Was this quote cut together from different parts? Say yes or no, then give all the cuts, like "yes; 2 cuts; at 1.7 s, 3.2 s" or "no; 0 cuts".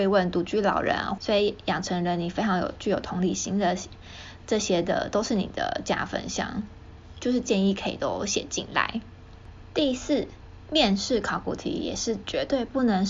yes; 2 cuts; at 1.2 s, 4.4 s